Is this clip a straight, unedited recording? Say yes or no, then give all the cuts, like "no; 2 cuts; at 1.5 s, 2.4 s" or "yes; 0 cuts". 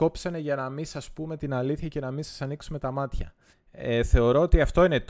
no; 1 cut; at 3.5 s